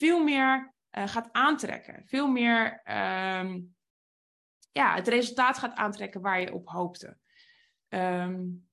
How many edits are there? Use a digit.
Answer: 0